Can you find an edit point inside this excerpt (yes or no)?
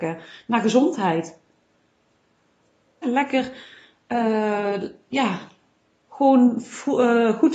yes